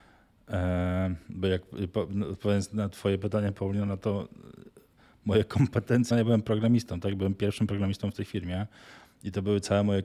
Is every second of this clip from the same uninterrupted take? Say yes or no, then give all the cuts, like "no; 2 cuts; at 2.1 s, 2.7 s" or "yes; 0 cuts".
no; 1 cut; at 6.1 s